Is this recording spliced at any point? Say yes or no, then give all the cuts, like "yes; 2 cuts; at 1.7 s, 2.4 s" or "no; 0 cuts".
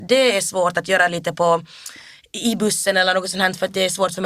no; 0 cuts